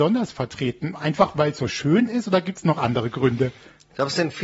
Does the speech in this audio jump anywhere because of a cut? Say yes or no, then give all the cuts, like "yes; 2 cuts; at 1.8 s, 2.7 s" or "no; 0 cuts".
no; 0 cuts